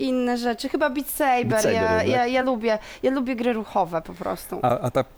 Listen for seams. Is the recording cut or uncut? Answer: uncut